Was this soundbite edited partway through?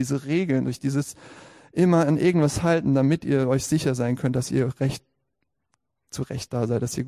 no; 0 cuts

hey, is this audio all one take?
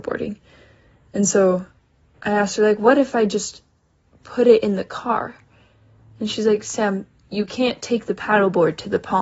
yes; 0 cuts

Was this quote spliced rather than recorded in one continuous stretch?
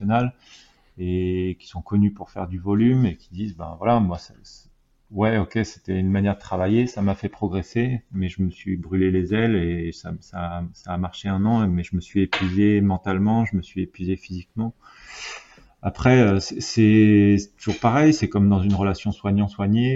no; 0 cuts

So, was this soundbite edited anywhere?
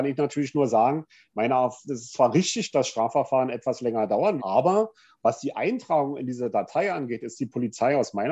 yes; 1 cut; at 4.4 s

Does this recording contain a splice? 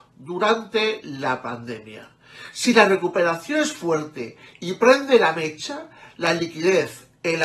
no; 0 cuts

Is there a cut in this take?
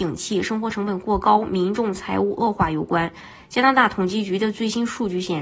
yes; 1 cut; at 3.4 s

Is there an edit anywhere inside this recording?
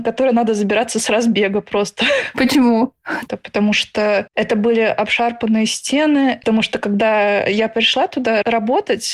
yes; 2 cuts; at 3.3 s, 6.4 s

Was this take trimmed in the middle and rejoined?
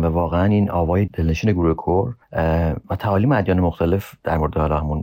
yes; 1 cut; at 1.1 s

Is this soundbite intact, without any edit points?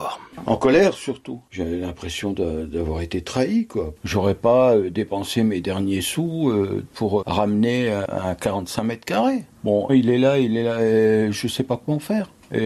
no; 2 cuts; at 7.2 s, 9.9 s

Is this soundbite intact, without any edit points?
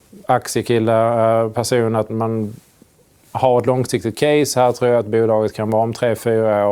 no; 1 cut; at 2.1 s

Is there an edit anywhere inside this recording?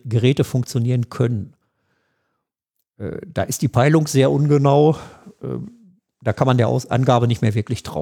no; 0 cuts

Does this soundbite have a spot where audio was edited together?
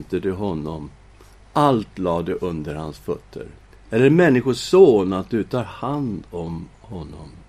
yes; 1 cut; at 3.7 s

